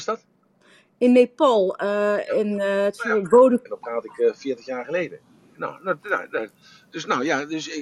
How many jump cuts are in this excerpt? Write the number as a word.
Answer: two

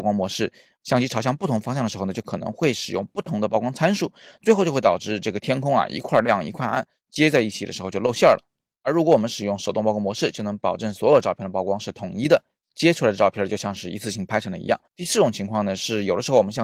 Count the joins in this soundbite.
one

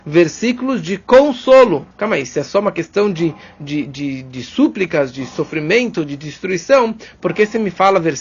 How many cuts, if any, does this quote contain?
one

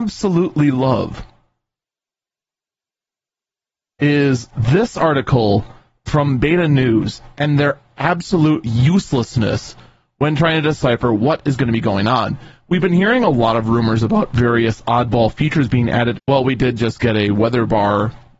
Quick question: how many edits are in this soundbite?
one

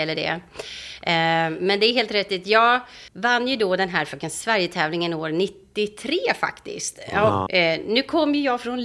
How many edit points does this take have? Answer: two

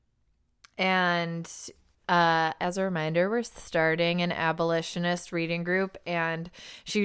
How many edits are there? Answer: one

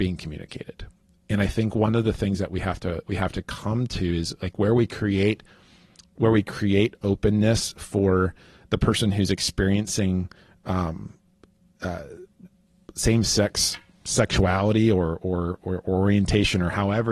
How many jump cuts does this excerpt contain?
zero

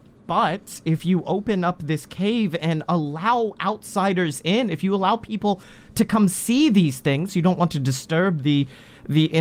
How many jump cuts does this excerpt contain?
one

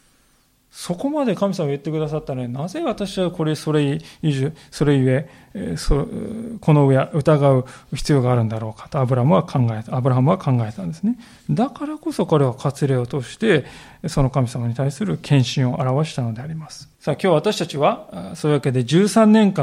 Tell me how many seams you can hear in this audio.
one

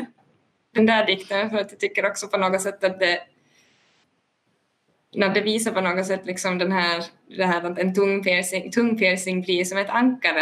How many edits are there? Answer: zero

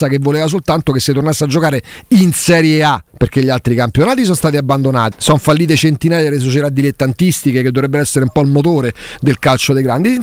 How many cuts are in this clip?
two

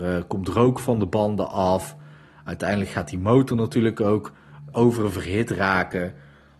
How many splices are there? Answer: one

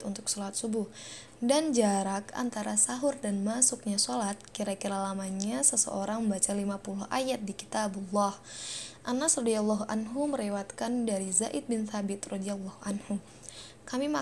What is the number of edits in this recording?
zero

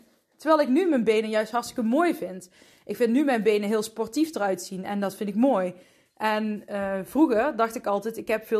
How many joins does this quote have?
zero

